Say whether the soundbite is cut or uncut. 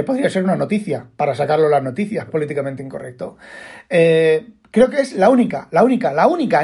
cut